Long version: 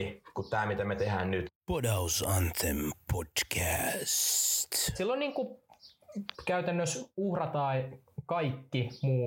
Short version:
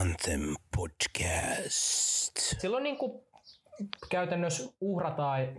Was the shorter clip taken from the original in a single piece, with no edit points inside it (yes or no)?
yes